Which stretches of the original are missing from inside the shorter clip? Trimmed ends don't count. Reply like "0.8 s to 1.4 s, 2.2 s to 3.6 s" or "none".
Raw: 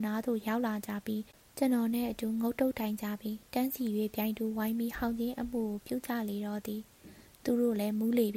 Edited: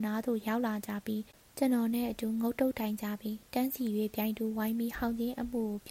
none